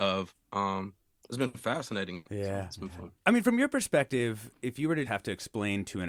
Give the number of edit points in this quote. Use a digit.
2